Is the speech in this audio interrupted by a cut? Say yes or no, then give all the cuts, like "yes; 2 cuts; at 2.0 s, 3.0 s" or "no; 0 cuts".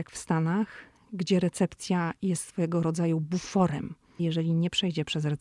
yes; 1 cut; at 4.2 s